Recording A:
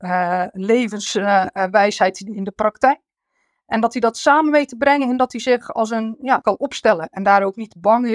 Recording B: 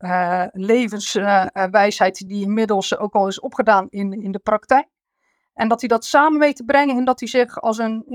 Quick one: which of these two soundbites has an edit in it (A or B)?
A